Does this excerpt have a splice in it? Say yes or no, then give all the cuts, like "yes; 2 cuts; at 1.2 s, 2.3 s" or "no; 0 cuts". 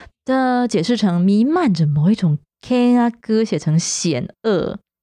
yes; 1 cut; at 2.5 s